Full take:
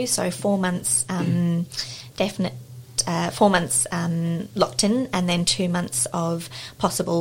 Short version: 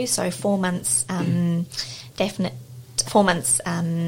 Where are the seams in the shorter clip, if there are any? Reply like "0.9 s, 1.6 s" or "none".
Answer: 3.0 s